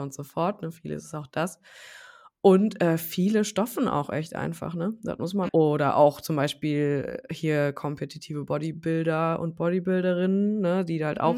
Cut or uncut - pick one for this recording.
cut